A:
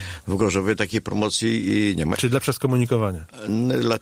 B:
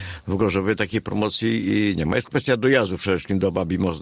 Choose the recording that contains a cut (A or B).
A